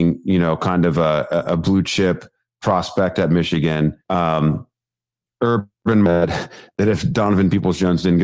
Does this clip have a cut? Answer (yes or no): yes